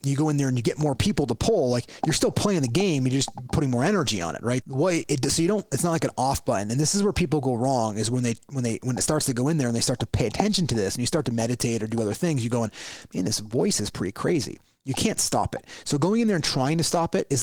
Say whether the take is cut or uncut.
cut